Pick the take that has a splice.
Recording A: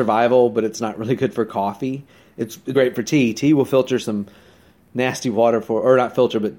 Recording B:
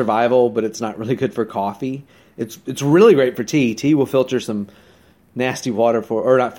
A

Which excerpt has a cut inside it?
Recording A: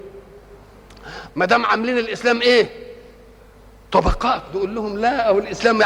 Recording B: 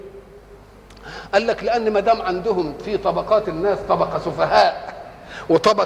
A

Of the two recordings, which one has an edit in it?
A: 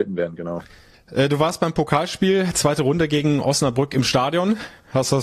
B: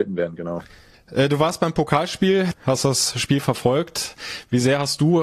B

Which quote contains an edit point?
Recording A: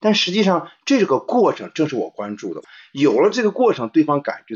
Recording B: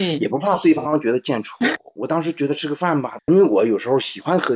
B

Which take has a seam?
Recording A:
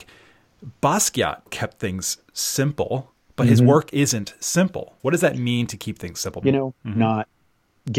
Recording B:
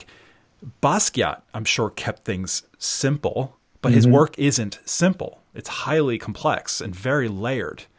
A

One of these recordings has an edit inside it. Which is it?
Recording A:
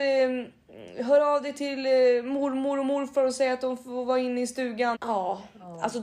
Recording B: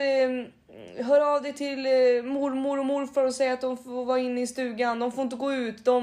A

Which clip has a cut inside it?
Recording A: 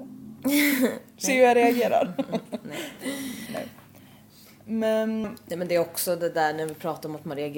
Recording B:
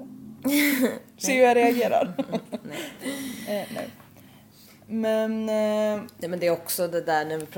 A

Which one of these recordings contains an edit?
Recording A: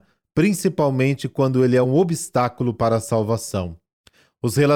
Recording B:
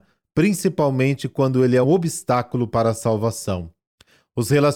B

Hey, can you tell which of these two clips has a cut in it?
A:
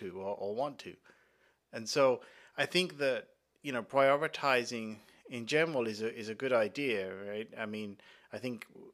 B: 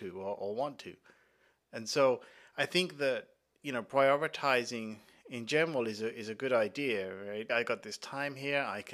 B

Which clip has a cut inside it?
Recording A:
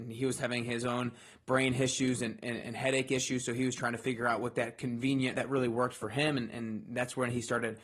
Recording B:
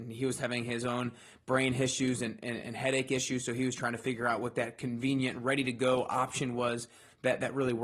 A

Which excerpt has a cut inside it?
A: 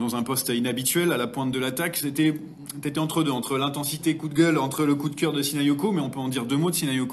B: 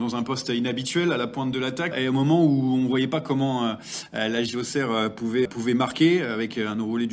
B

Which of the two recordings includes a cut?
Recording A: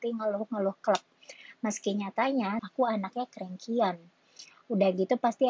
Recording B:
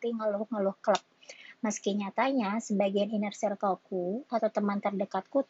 A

